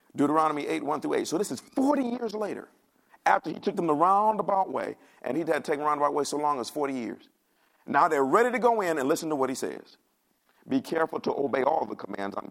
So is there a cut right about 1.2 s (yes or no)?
no